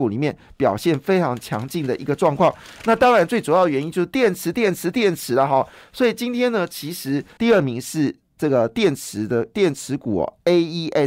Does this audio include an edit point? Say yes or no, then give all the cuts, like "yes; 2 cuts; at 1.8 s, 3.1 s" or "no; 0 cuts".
yes; 1 cut; at 7.4 s